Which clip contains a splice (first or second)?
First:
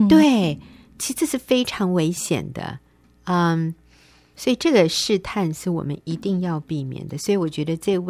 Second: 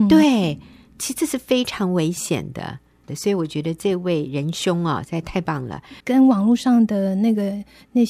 second